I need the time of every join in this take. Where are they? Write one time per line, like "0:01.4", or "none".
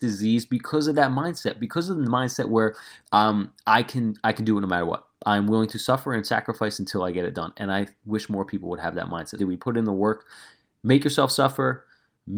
0:03.0
0:09.4